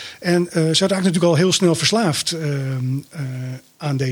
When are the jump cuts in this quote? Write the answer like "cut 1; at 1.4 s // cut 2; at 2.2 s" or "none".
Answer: none